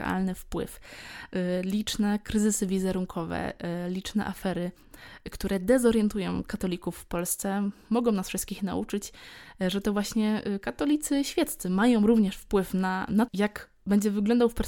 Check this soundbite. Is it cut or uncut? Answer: cut